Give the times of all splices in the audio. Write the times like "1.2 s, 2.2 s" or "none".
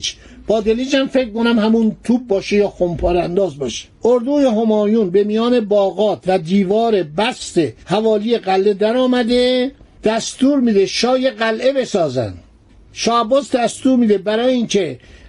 4.0 s, 7.8 s